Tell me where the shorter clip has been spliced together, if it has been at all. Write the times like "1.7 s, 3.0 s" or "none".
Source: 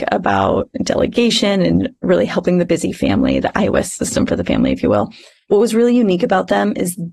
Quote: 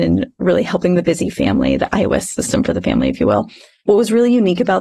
none